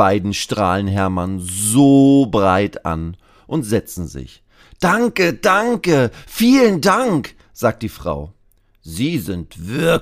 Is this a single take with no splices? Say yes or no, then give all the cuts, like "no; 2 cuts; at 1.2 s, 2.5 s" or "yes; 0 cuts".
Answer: yes; 0 cuts